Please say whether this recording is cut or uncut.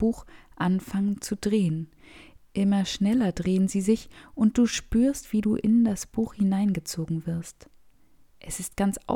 uncut